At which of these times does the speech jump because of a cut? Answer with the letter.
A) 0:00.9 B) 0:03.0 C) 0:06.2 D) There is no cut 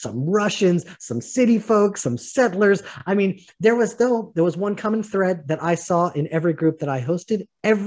D